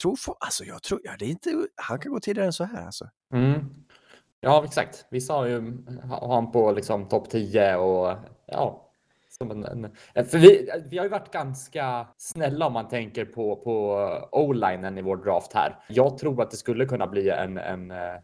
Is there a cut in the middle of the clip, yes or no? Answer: yes